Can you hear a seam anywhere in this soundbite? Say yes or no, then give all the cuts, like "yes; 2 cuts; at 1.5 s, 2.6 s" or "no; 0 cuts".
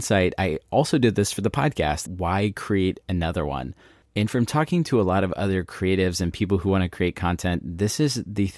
yes; 1 cut; at 2.1 s